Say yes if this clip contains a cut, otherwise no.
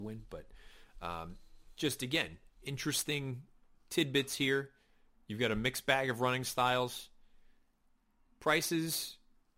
no